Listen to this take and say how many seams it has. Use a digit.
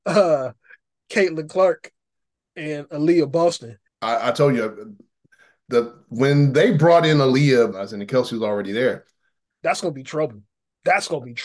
3